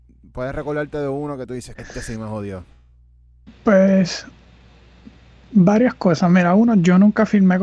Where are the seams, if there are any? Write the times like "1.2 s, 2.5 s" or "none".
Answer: 1.7 s